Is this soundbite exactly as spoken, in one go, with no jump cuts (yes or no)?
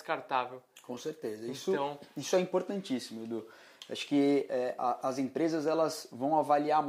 yes